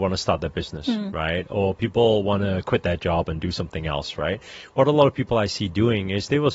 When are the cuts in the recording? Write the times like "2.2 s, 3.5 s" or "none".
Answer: none